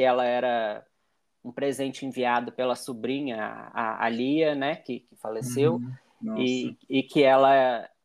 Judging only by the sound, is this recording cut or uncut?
uncut